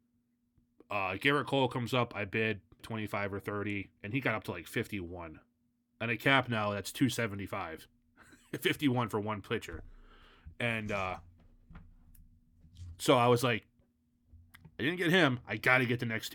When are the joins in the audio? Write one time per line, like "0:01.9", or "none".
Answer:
0:02.8